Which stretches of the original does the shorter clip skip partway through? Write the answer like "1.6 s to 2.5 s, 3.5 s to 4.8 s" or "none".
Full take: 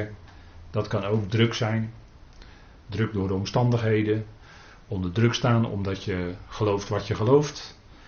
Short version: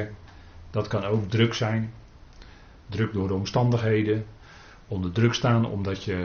none